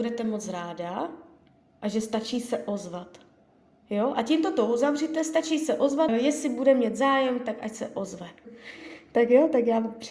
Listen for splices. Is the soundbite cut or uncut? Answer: cut